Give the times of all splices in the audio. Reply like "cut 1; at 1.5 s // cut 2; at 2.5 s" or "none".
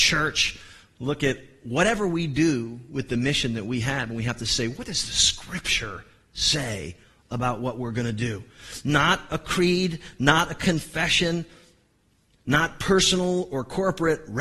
none